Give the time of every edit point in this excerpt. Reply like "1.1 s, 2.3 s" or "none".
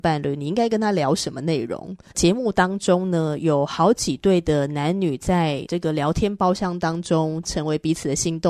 2.1 s